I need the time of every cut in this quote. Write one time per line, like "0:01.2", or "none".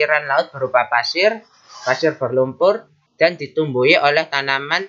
0:03.1